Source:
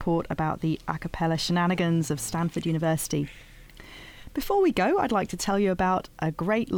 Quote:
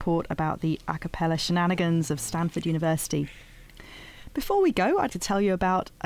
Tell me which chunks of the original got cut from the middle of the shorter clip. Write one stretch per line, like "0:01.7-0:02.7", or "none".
0:05.1-0:05.3